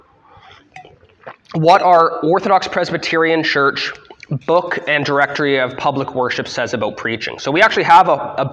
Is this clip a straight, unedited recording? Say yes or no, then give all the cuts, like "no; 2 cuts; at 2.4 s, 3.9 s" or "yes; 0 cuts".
yes; 0 cuts